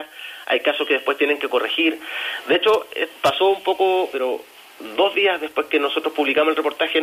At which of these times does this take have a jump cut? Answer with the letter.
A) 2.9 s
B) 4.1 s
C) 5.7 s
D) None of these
B